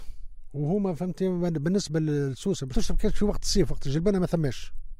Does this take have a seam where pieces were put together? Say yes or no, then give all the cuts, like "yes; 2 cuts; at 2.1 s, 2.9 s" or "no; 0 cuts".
yes; 1 cut; at 2.7 s